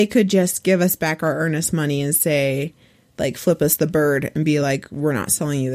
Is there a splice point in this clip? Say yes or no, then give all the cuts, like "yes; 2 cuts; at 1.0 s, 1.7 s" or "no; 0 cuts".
no; 0 cuts